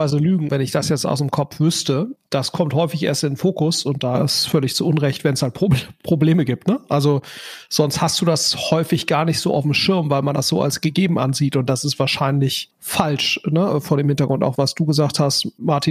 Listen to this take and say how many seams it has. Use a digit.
1